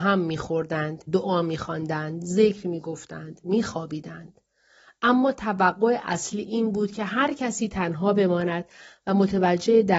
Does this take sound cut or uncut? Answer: cut